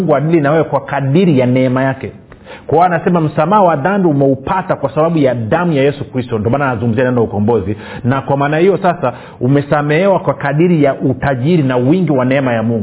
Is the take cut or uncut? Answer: uncut